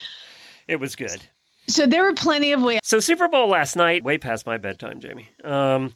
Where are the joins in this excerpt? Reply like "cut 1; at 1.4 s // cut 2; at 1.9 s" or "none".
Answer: cut 1; at 2.8 s // cut 2; at 4.0 s